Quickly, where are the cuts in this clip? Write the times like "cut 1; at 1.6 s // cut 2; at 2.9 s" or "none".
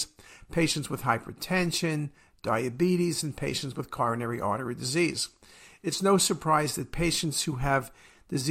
none